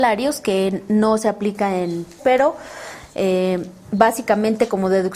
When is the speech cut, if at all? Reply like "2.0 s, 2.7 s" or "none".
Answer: 2.2 s